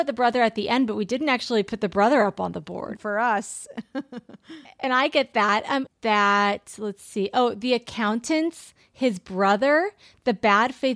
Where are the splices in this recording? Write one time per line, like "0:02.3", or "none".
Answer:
0:03.0
0:05.9